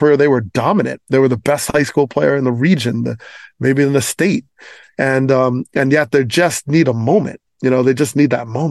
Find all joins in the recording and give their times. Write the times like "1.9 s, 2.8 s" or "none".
none